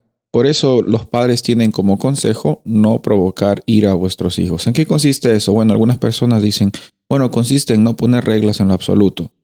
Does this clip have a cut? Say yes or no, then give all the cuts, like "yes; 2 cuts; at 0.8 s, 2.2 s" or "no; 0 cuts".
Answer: no; 0 cuts